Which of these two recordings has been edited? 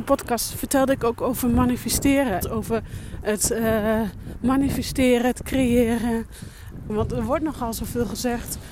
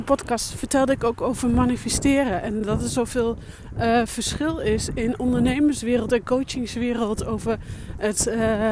first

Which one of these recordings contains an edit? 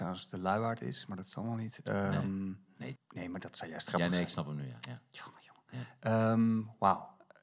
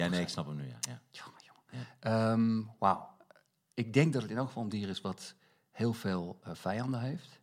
first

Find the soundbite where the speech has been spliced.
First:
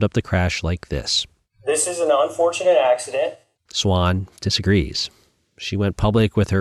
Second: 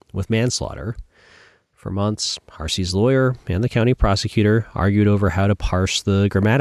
first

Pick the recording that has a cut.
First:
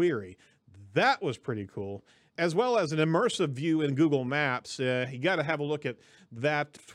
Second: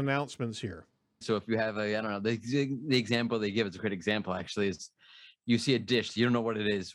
second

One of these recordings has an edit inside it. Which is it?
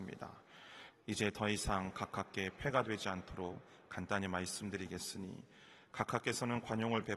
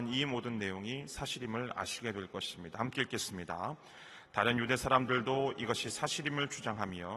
first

